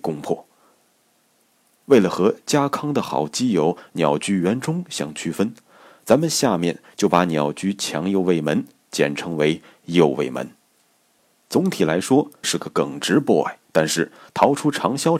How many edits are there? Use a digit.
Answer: 2